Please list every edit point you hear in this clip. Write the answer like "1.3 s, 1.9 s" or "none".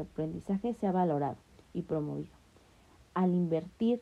none